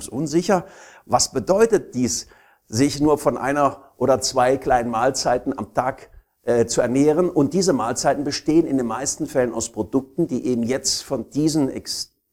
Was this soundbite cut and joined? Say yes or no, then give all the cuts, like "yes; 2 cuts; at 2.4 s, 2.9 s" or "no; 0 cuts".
no; 0 cuts